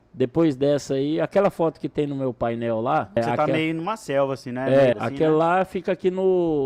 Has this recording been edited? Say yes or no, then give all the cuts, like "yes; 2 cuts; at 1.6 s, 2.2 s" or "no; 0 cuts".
yes; 2 cuts; at 3.2 s, 4.9 s